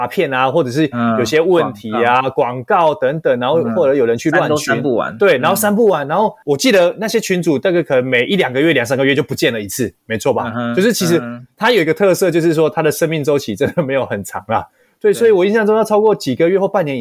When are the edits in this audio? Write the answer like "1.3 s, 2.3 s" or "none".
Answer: none